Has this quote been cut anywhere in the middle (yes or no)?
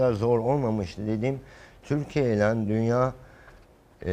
no